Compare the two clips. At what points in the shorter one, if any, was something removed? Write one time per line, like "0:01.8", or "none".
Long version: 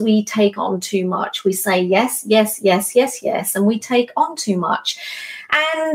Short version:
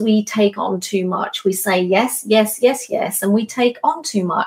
0:02.6